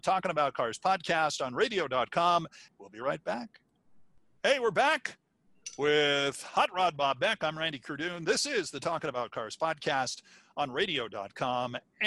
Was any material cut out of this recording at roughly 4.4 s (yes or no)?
no